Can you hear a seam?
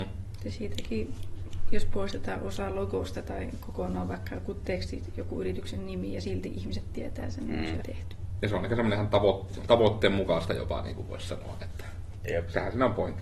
yes; 1 cut; at 7.8 s

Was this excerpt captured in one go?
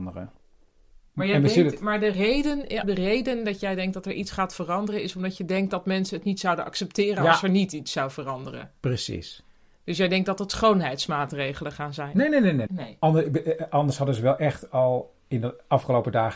no; 2 cuts; at 2.8 s, 12.7 s

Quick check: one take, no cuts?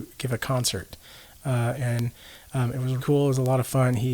no; 2 cuts; at 1.7 s, 3.0 s

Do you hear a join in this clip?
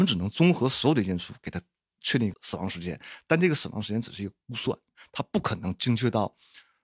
yes; 1 cut; at 2.3 s

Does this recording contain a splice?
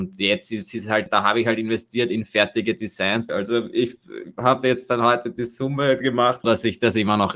yes; 3 cuts; at 1.1 s, 3.3 s, 6.4 s

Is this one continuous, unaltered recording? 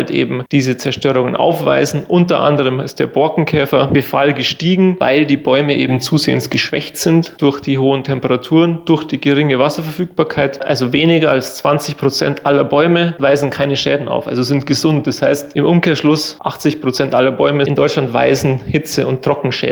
yes; 0 cuts

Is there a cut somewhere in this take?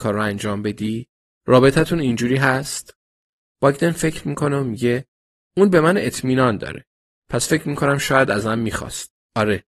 no; 0 cuts

